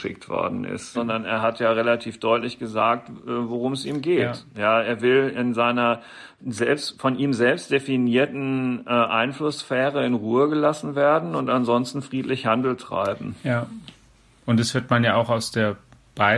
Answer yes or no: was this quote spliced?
yes